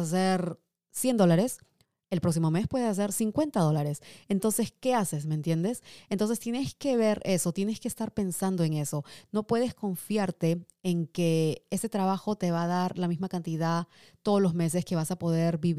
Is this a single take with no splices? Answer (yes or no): yes